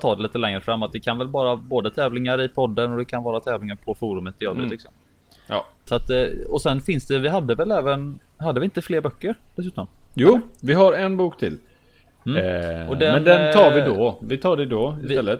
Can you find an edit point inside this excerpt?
yes; 1 cut; at 5.9 s

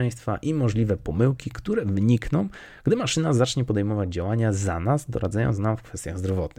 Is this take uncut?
yes; 0 cuts

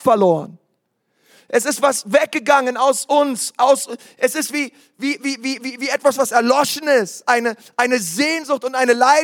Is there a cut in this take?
no; 0 cuts

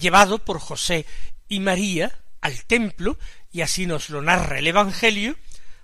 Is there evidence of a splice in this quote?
no; 0 cuts

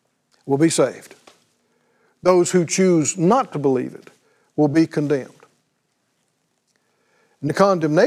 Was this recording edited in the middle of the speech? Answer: no; 0 cuts

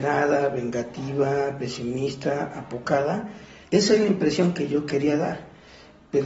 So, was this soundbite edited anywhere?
yes; 1 cut; at 3.6 s

